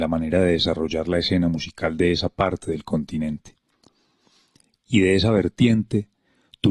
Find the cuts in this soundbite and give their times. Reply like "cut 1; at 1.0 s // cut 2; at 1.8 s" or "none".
none

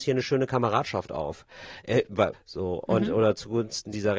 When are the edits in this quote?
cut 1; at 2.3 s

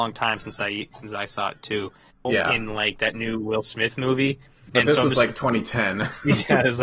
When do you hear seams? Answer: cut 1; at 2.1 s

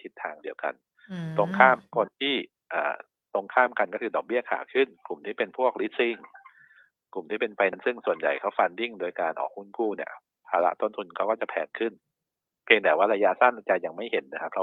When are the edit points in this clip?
cut 1; at 7.7 s

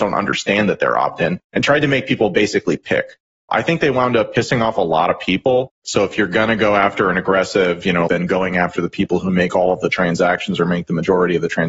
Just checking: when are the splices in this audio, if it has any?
cut 1; at 3.5 s // cut 2; at 5.8 s // cut 3; at 8.1 s

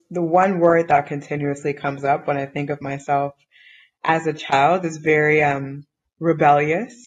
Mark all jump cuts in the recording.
none

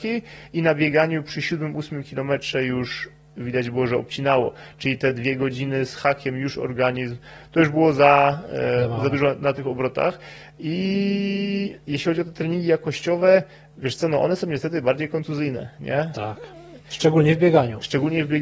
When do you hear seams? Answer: none

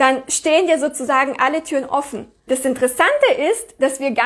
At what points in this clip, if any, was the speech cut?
cut 1; at 2.5 s

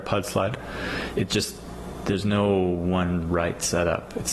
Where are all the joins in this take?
cut 1; at 1.1 s

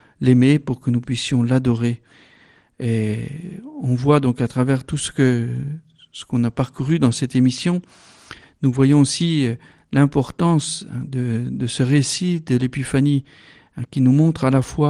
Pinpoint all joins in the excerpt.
none

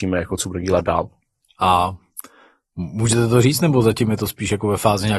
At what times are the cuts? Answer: cut 1; at 1.4 s

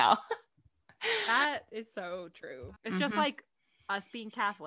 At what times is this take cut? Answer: cut 1; at 2.8 s

